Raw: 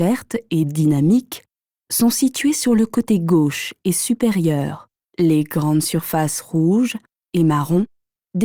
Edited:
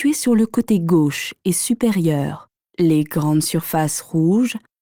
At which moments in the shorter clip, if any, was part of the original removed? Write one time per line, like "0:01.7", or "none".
none